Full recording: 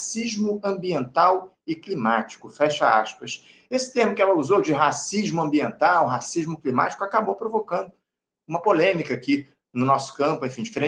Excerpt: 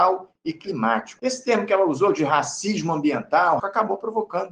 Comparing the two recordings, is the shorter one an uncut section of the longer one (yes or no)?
no